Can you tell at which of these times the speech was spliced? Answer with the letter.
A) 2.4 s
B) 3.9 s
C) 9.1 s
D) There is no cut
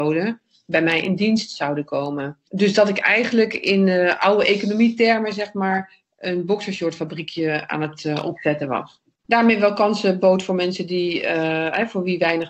D